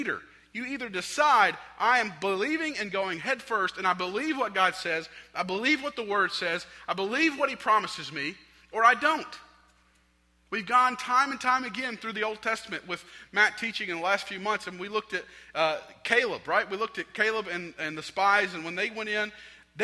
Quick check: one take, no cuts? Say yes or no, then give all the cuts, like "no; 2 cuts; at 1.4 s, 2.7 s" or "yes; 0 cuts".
yes; 0 cuts